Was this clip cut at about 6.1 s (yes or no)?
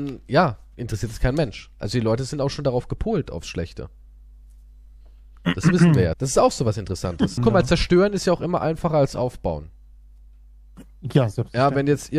yes